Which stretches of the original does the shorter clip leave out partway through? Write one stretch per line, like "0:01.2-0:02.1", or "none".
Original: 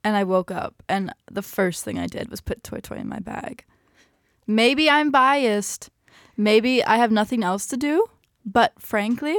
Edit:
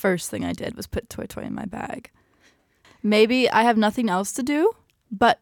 0:04.4-0:06.2